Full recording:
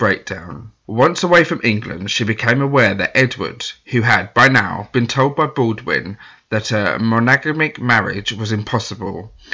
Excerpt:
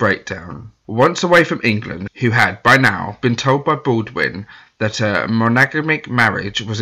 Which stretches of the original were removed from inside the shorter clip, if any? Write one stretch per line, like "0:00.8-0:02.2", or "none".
0:02.1-0:03.8